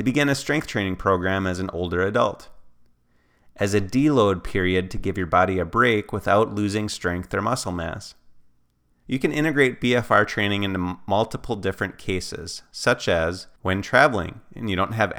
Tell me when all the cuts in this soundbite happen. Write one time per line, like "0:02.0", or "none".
0:09.0
0:13.6